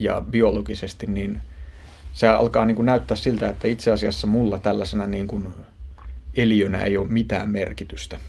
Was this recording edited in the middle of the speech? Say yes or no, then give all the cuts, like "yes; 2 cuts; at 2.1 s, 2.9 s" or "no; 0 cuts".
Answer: no; 0 cuts